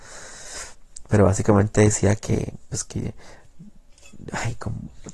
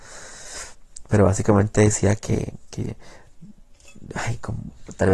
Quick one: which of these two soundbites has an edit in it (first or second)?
second